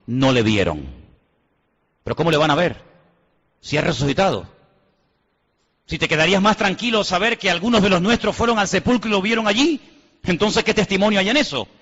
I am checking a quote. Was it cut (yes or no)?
no